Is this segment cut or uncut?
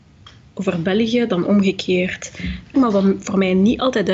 cut